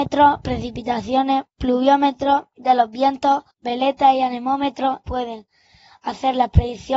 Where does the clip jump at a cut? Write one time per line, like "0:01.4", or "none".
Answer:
0:03.5
0:05.0